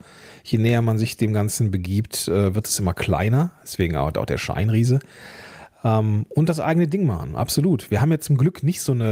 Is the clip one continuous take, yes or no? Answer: yes